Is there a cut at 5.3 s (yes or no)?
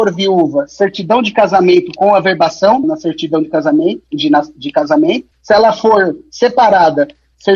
yes